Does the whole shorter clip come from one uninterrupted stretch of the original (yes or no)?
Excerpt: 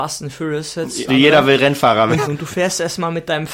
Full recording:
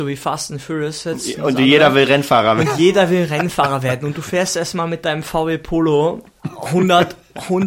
no